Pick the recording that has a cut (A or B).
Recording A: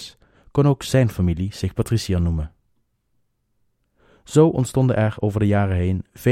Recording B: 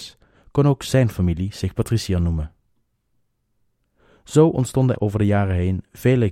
B